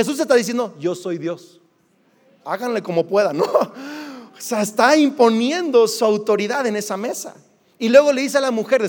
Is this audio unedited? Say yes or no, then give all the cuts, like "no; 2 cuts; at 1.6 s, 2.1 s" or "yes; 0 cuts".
yes; 0 cuts